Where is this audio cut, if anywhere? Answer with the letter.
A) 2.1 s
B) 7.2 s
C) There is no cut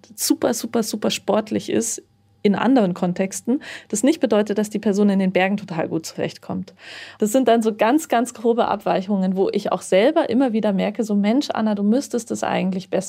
B